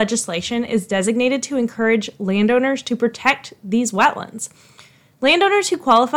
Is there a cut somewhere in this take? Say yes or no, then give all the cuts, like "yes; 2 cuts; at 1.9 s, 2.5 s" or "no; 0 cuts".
no; 0 cuts